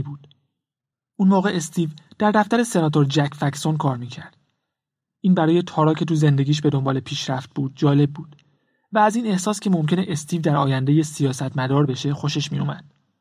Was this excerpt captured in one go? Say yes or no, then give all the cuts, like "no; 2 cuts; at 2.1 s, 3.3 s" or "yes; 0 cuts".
yes; 0 cuts